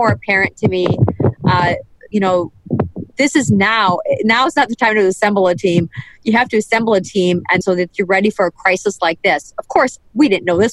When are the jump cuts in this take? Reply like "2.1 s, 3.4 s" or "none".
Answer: 2.1 s, 7.6 s